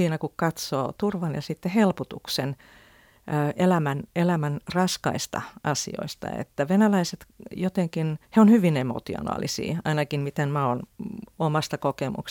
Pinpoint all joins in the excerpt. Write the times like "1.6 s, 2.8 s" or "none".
8.2 s